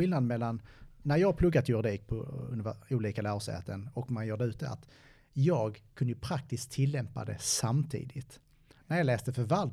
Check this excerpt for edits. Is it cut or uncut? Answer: uncut